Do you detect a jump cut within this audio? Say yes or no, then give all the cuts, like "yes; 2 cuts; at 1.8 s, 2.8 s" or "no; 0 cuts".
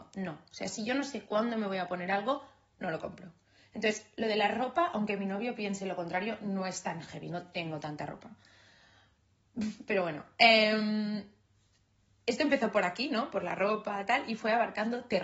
no; 0 cuts